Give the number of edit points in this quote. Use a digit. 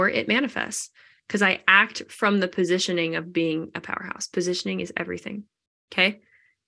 0